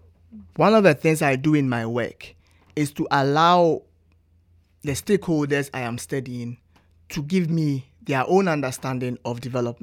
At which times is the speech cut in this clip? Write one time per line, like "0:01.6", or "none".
none